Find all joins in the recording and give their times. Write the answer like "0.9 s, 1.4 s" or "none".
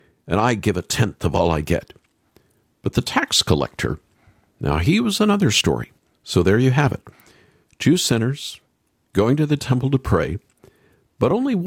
6.1 s